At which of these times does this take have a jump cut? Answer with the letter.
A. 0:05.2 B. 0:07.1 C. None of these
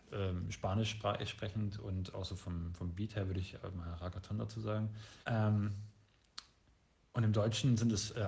A